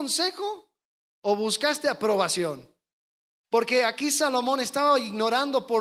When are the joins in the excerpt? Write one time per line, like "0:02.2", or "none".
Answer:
0:03.4